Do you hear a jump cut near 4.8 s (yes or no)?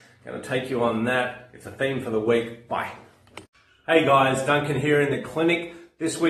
no